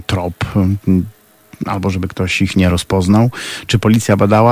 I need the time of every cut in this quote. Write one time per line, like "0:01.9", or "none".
none